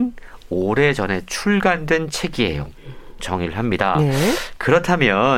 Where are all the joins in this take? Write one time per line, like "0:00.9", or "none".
0:03.2